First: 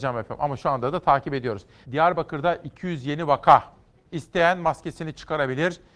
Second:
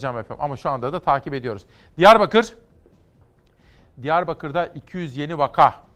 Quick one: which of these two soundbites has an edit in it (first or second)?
first